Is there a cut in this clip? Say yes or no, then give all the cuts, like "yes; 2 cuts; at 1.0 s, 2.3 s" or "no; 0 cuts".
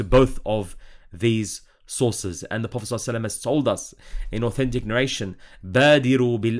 no; 0 cuts